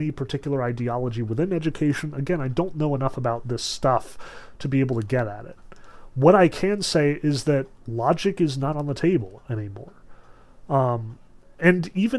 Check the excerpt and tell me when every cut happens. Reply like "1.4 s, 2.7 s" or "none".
none